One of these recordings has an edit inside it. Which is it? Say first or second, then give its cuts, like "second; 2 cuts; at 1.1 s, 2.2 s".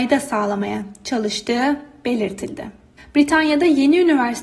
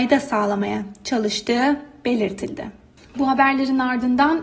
first; 1 cut; at 3.0 s